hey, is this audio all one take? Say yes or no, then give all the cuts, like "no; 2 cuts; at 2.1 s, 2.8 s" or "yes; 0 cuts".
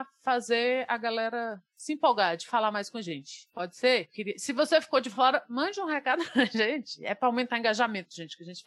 yes; 0 cuts